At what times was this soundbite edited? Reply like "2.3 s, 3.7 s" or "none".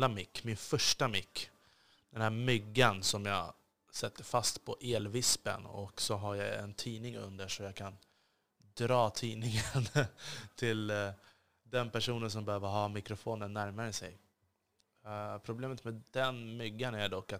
none